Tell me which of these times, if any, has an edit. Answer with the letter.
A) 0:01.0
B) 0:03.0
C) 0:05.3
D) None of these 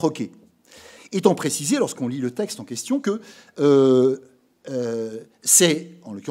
A